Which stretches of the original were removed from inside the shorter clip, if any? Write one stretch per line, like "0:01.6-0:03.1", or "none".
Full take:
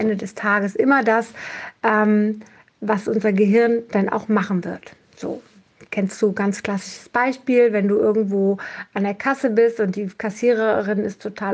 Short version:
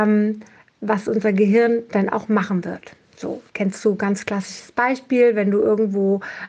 0:05.5-0:05.9

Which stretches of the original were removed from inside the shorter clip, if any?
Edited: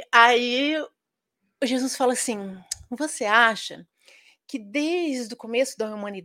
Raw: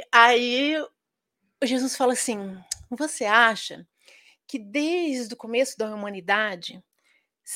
none

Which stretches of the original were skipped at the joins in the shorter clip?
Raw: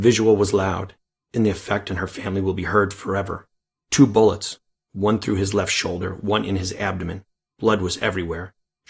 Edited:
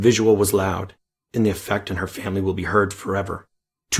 none

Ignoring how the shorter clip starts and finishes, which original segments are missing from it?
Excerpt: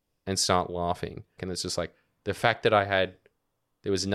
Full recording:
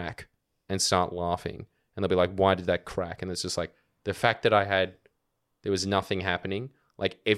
0:01.8-0:03.2

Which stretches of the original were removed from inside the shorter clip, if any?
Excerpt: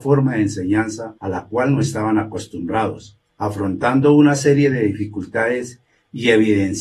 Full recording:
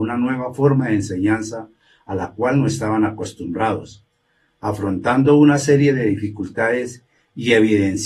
0:01.7-0:02.0
0:04.1-0:04.5

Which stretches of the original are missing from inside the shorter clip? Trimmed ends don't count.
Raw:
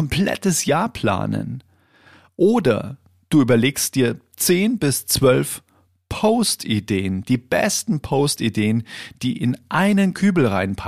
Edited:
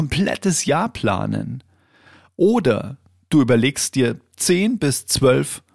none

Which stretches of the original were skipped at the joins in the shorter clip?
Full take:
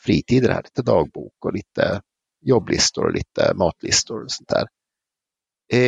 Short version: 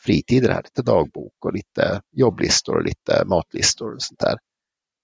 0:02.1-0:02.4

